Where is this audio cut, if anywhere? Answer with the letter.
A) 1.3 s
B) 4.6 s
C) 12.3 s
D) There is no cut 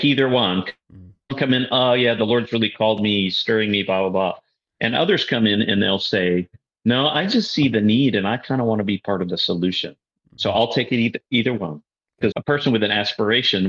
C